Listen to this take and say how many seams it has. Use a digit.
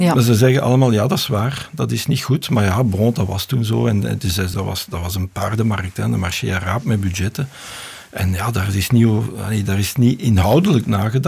1